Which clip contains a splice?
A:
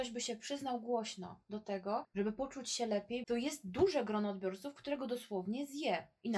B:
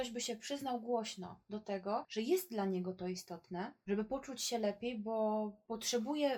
A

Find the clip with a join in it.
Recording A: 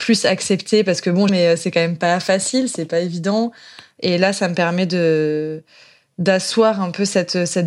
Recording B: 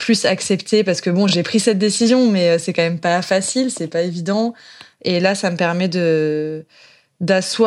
A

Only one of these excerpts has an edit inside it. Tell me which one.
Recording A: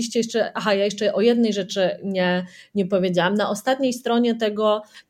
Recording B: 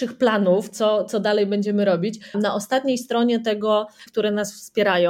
B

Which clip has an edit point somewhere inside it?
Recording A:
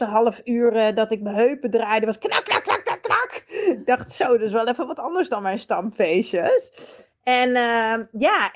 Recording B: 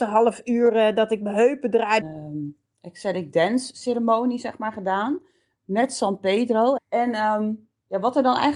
B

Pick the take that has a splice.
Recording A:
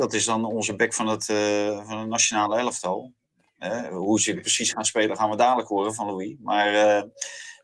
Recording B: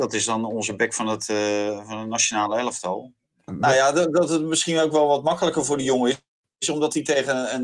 B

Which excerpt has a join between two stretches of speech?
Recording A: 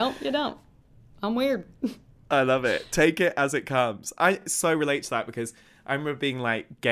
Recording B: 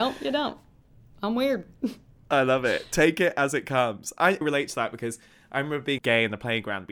B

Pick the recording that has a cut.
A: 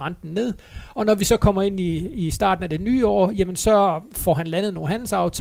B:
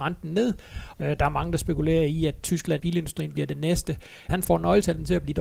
B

